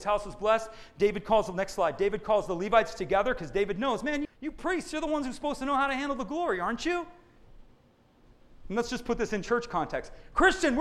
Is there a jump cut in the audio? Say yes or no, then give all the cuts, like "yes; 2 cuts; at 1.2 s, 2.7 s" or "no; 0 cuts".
yes; 1 cut; at 4.2 s